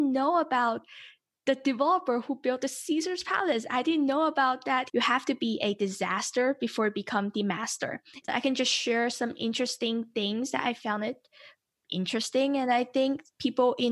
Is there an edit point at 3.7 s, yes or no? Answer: no